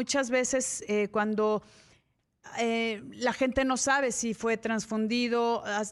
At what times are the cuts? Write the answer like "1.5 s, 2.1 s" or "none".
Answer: none